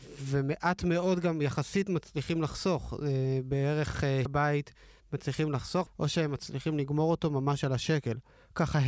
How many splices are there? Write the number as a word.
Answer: two